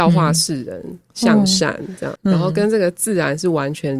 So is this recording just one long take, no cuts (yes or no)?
no